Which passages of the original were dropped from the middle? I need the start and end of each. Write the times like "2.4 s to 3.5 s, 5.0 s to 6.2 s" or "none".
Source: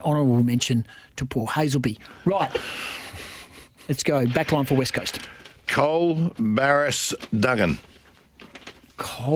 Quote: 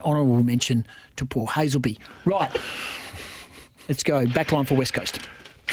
none